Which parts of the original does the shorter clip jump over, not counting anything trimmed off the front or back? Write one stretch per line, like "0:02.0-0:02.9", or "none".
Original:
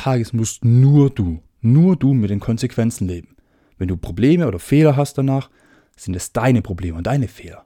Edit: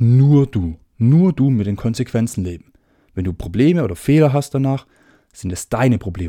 none